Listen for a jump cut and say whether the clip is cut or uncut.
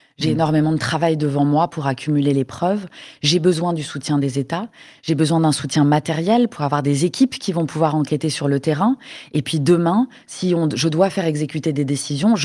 uncut